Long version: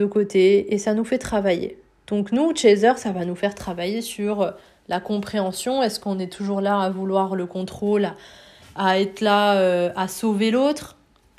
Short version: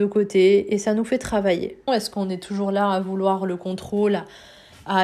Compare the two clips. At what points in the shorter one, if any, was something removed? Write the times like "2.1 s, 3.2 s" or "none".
1.9 s